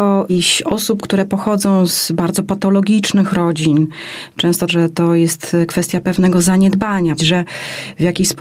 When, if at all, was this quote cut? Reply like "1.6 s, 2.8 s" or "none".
4.7 s, 7.2 s